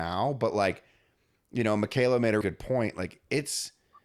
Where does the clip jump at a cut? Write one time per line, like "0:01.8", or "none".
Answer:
0:02.4